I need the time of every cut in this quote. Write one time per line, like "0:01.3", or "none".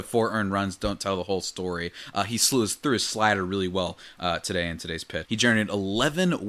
0:05.2